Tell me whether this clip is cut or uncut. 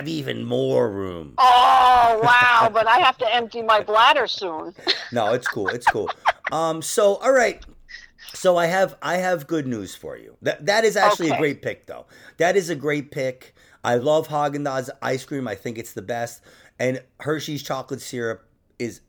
uncut